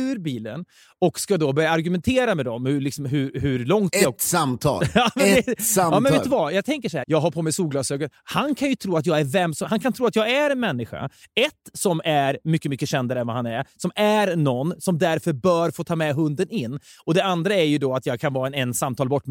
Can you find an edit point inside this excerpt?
yes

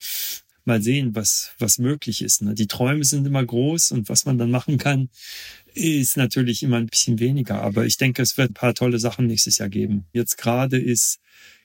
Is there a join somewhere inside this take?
yes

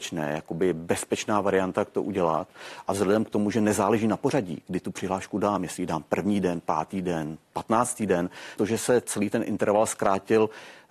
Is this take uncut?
no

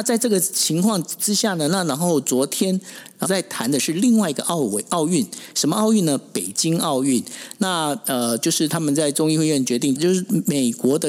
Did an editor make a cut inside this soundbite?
yes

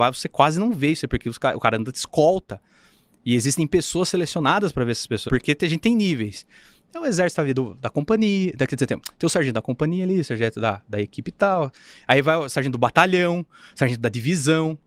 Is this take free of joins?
no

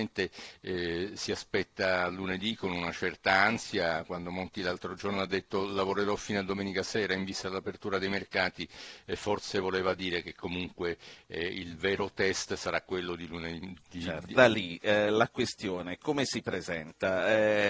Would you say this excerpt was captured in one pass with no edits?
no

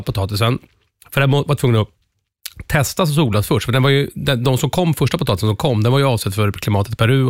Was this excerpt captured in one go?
yes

